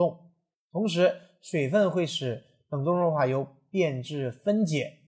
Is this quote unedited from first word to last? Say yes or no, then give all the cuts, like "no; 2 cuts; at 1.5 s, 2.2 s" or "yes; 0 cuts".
yes; 0 cuts